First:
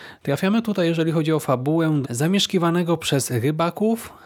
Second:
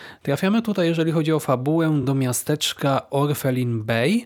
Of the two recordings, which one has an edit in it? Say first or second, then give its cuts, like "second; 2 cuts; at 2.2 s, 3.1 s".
first; 1 cut; at 2.0 s